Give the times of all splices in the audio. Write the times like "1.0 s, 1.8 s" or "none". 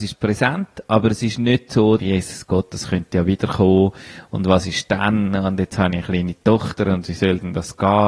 2.0 s